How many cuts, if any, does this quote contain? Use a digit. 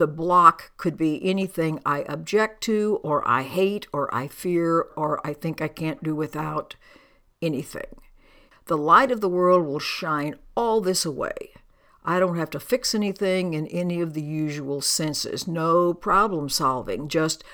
3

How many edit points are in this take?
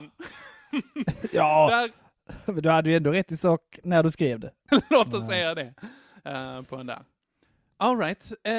1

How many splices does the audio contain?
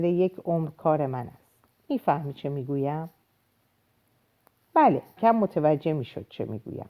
1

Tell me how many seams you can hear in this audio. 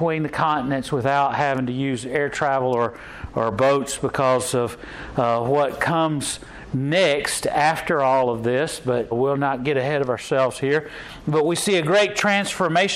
1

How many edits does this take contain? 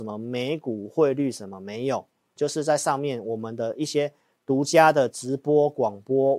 1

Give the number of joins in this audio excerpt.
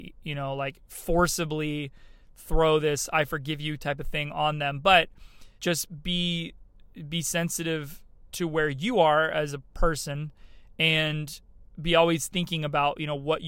1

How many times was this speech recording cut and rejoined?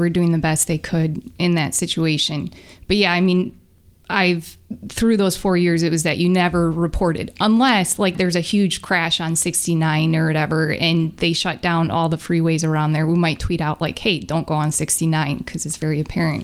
1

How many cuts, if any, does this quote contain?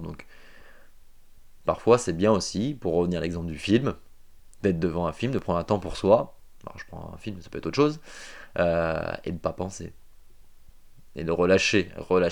0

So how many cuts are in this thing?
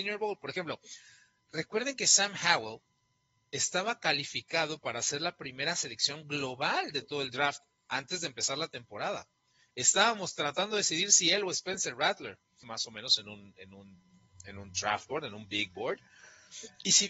1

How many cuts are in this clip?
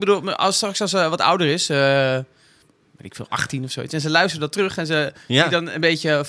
1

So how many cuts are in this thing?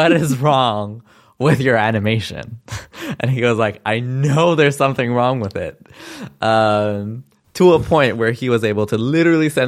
0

